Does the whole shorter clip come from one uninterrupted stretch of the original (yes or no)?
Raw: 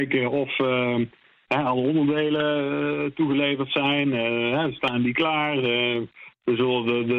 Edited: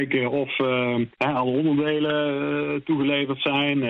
no